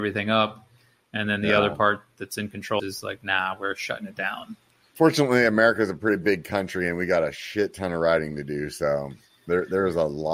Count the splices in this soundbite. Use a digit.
1